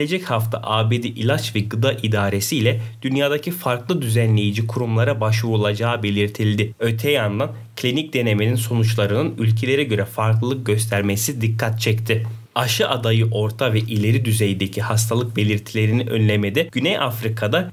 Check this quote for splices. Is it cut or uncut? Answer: cut